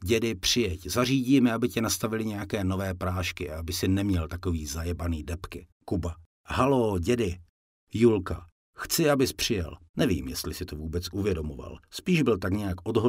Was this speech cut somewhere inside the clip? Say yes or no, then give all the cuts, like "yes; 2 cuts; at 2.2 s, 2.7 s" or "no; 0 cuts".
yes; 2 cuts; at 5.7 s, 9.9 s